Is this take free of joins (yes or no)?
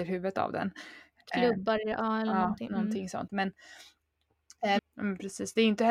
no